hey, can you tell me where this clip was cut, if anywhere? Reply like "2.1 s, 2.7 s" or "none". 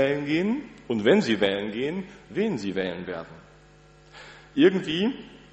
none